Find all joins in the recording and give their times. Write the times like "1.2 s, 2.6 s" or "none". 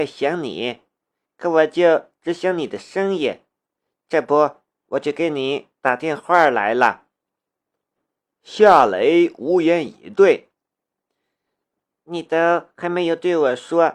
none